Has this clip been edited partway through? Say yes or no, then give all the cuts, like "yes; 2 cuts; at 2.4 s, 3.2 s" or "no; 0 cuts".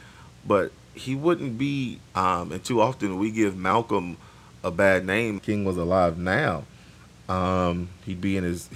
yes; 2 cuts; at 2.1 s, 5.4 s